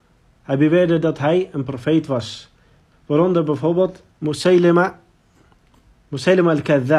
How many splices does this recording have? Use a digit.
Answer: 2